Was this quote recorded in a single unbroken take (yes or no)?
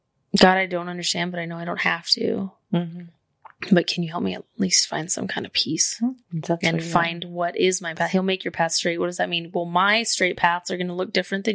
yes